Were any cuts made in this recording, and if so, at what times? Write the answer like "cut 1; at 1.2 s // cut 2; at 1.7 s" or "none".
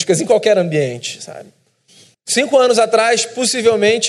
cut 1; at 2.1 s